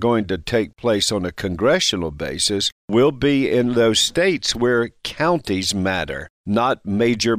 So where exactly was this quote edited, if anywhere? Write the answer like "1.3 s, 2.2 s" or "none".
none